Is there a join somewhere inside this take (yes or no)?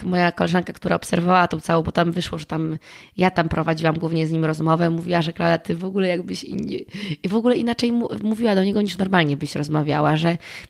no